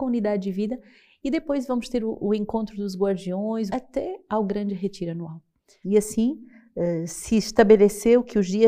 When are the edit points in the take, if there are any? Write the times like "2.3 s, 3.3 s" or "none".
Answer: 3.7 s, 5.8 s